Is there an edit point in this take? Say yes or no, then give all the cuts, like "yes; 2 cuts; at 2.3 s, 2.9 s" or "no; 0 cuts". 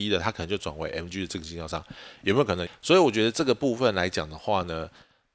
yes; 1 cut; at 2.7 s